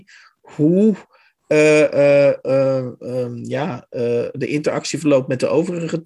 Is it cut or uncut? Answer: uncut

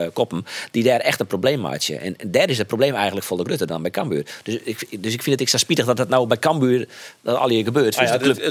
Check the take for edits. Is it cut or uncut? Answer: uncut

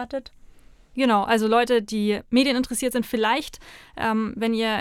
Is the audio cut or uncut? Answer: uncut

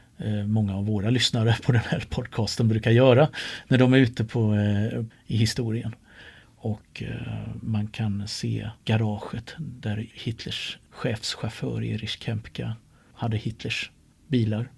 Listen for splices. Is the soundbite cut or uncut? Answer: cut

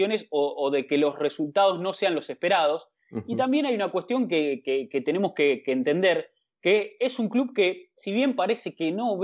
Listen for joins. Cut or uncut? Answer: uncut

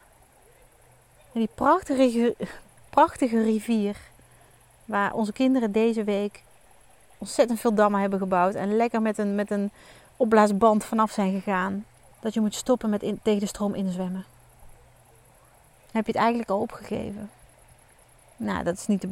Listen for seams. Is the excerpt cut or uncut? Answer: cut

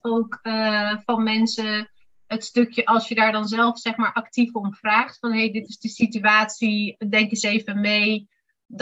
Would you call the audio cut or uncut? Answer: uncut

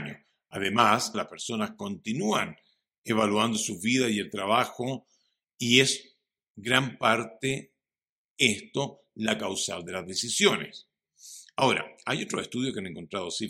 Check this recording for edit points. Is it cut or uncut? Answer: cut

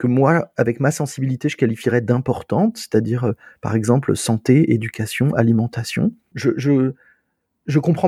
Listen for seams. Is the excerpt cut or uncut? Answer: cut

